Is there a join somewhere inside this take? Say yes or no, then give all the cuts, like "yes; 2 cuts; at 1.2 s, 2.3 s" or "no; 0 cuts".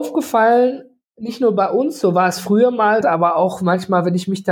yes; 1 cut; at 3.0 s